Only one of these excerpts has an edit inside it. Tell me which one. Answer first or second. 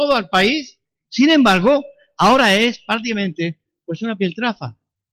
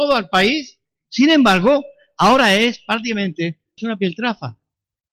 second